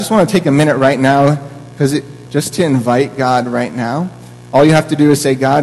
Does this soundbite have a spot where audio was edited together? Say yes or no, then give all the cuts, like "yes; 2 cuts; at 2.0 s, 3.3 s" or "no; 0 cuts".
yes; 1 cut; at 2.3 s